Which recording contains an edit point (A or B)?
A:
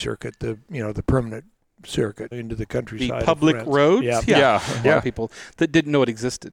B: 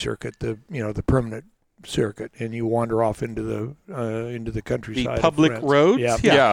A